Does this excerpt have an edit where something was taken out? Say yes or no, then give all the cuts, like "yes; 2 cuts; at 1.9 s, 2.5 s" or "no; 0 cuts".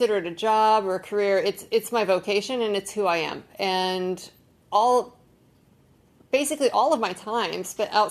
no; 0 cuts